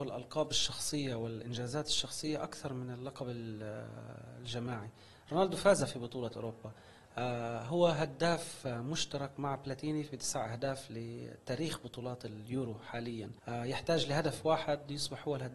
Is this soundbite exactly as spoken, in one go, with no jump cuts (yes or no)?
no